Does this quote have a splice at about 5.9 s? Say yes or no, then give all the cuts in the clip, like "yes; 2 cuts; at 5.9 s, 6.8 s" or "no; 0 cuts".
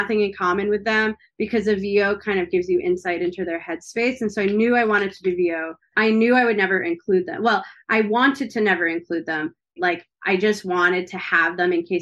yes; 2 cuts; at 5.9 s, 9.8 s